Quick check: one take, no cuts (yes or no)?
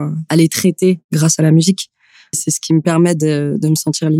yes